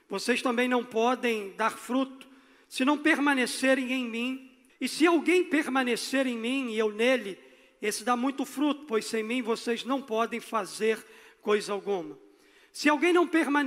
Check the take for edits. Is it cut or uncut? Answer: cut